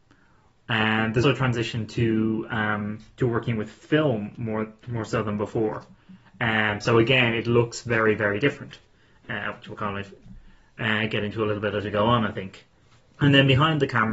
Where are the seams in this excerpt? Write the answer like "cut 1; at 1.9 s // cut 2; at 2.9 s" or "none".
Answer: cut 1; at 1.2 s

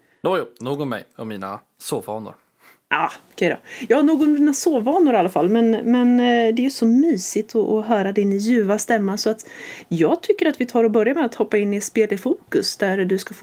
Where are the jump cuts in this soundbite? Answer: none

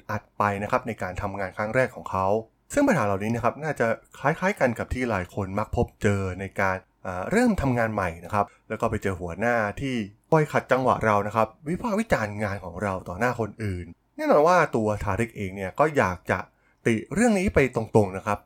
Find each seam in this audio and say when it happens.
none

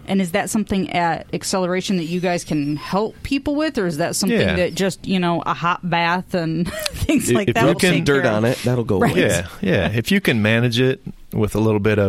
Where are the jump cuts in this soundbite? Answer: none

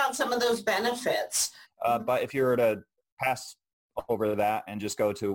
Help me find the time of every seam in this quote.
cut 1; at 1.6 s

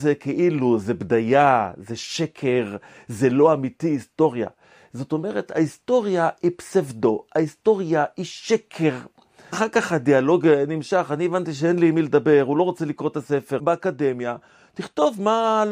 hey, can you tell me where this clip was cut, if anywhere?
cut 1; at 9.5 s // cut 2; at 13.6 s

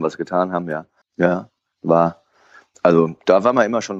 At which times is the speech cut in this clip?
cut 1; at 1.0 s

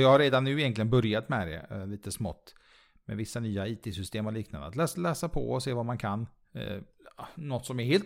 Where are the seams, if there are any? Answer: none

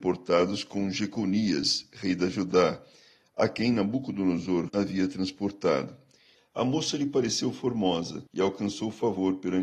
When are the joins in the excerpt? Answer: cut 1; at 4.7 s // cut 2; at 6.4 s // cut 3; at 8.3 s

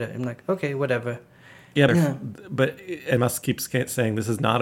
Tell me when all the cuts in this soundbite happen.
cut 1; at 1.9 s // cut 2; at 3.2 s

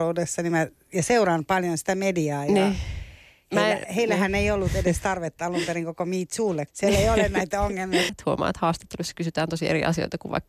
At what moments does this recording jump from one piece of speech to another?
cut 1; at 6.7 s // cut 2; at 8.1 s

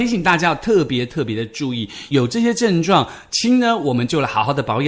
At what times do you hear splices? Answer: none

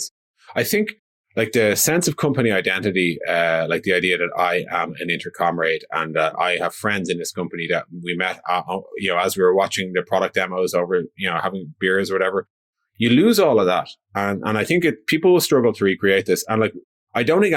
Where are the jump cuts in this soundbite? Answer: none

